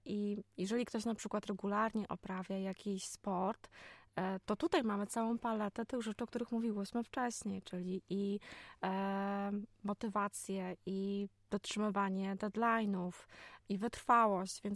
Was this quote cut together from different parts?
no; 0 cuts

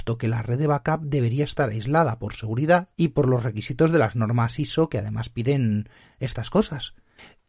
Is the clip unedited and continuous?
no; 1 cut; at 2.9 s

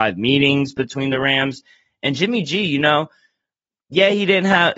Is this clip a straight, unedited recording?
yes; 0 cuts

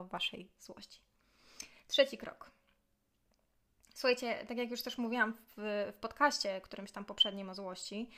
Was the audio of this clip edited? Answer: no; 0 cuts

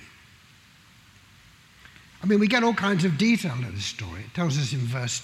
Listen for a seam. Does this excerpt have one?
yes; 1 cut; at 2.1 s

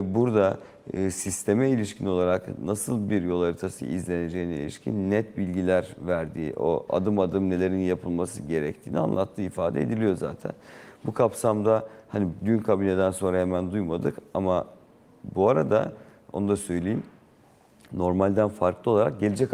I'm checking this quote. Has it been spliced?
no; 0 cuts

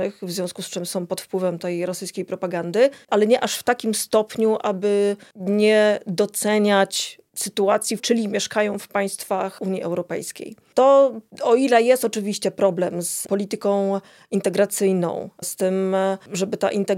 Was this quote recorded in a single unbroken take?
no; 1 cut; at 8.0 s

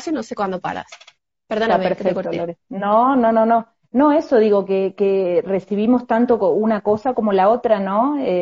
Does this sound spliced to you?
no; 0 cuts

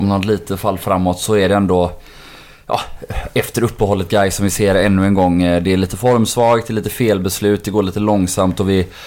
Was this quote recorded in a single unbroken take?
yes; 0 cuts

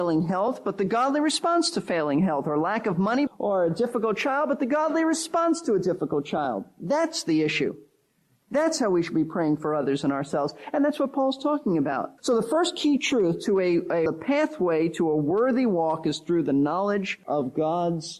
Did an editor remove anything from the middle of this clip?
yes; 3 cuts; at 3.3 s, 12.2 s, 14.1 s

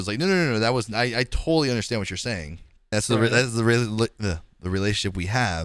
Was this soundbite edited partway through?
yes; 1 cut; at 2.9 s

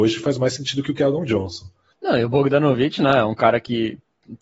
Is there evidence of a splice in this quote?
yes; 1 cut; at 1.9 s

